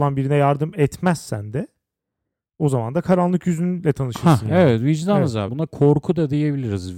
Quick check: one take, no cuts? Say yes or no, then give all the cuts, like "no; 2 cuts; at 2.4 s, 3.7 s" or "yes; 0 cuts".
no; 1 cut; at 5.5 s